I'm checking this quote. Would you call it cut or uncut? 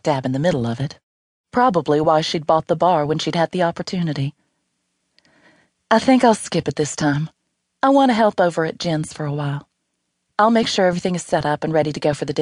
uncut